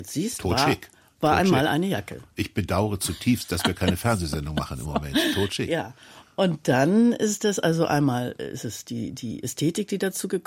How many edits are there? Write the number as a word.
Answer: zero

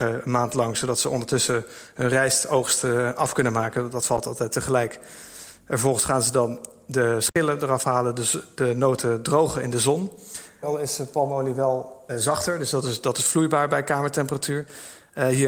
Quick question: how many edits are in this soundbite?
two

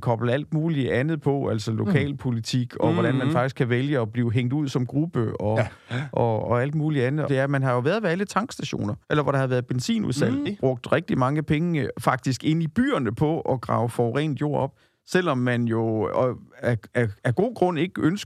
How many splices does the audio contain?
three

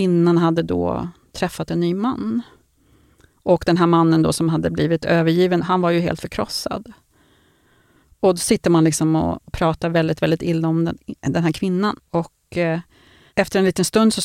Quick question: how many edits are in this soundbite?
one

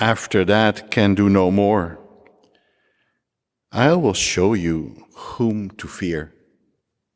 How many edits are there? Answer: zero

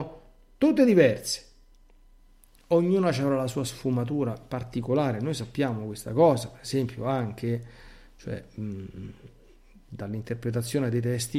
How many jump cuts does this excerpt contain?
zero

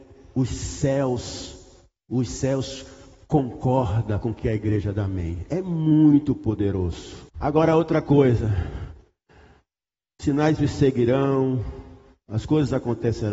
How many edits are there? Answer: one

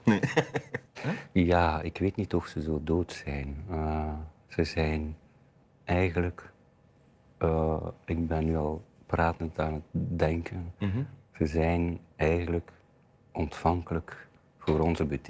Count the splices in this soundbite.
one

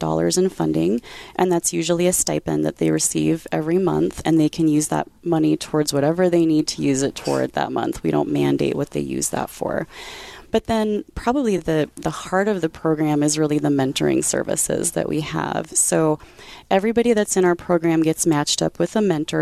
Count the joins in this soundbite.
zero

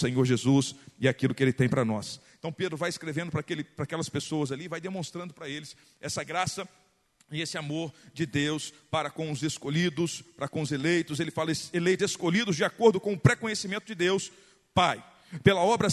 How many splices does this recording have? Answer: one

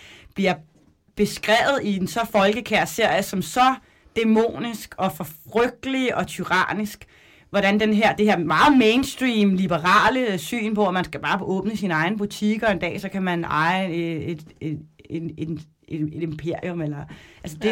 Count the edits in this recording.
zero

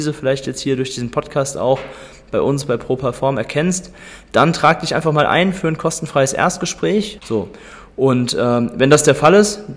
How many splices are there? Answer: one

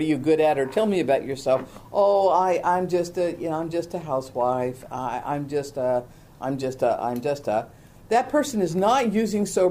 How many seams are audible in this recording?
zero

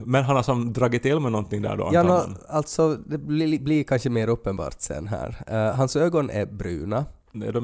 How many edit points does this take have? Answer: zero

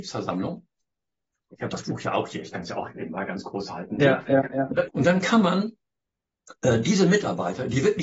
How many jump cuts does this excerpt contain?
one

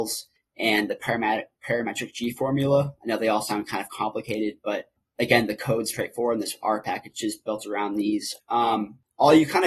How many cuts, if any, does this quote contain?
two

